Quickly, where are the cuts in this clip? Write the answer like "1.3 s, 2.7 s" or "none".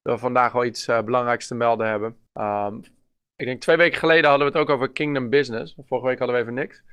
2.3 s